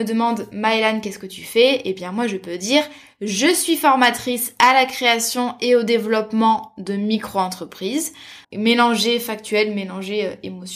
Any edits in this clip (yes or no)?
yes